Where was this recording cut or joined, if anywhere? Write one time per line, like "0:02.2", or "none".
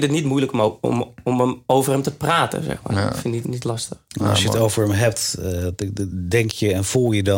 0:03.4